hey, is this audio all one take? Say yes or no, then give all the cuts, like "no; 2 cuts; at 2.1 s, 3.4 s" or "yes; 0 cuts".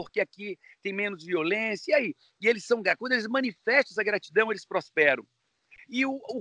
yes; 0 cuts